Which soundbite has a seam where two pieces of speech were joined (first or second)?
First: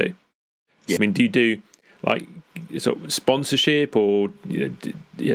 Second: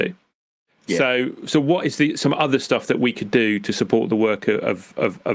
first